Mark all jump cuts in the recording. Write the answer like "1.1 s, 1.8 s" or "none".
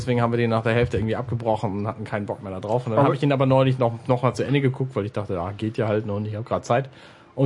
none